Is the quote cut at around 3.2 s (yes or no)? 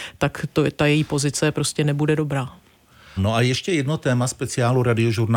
yes